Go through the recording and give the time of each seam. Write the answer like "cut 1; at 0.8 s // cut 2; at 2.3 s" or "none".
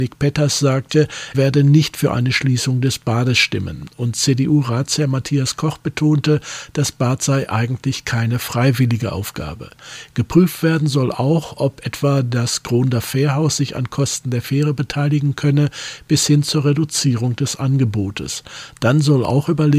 cut 1; at 1.3 s